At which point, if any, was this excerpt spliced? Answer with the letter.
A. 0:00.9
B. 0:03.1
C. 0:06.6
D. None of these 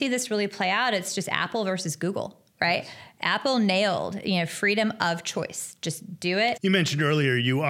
C